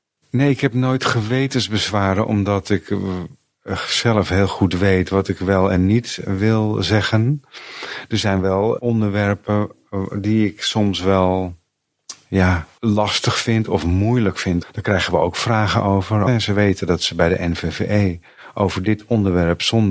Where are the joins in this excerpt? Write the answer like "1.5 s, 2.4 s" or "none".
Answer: 14.6 s, 16.3 s